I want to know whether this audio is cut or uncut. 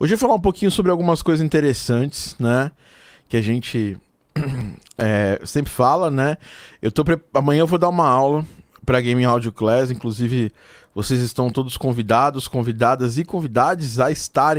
uncut